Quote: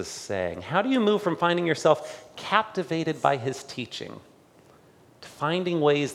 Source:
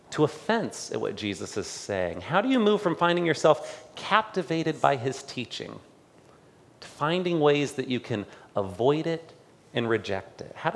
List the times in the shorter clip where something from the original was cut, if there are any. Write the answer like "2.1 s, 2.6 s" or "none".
none